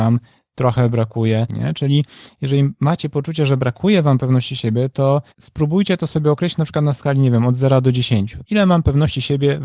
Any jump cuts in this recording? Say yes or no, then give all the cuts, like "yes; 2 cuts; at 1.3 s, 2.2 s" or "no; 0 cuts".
yes; 2 cuts; at 1.5 s, 5.3 s